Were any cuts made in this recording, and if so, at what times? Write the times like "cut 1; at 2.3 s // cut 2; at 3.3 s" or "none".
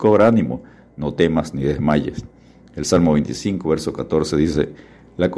none